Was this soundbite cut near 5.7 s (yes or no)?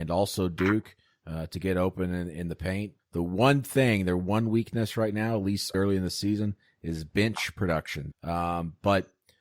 yes